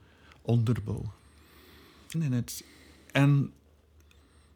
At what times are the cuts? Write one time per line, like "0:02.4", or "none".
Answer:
0:02.1

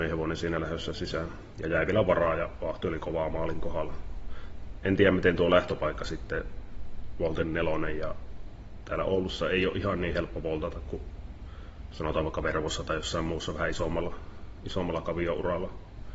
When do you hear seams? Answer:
none

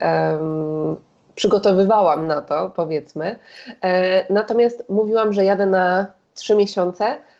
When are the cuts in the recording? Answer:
none

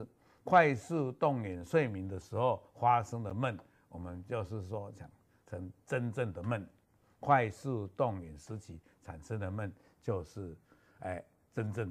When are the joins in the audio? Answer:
none

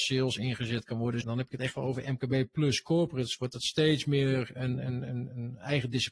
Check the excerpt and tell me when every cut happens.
0:01.2

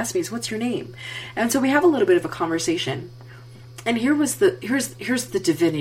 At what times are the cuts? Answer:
none

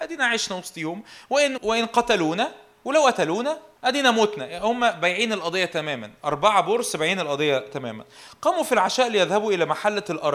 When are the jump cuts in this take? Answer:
0:01.6
0:03.8

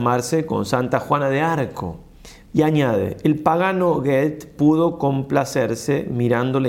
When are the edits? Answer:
0:02.5

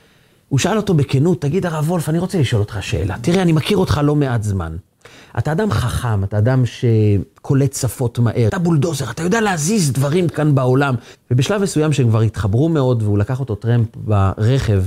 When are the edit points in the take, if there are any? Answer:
0:08.5
0:11.1

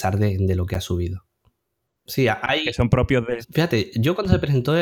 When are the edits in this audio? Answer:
0:01.9
0:03.4

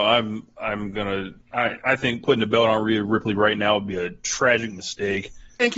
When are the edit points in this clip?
0:01.4

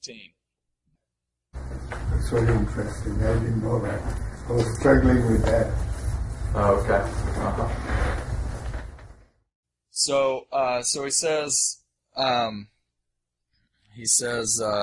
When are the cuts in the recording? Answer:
none

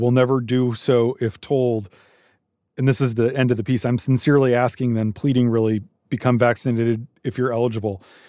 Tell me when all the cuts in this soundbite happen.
none

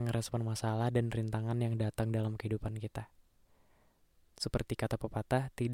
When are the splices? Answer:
0:04.3

